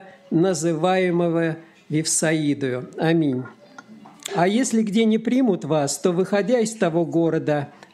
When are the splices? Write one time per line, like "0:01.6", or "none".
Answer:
0:04.3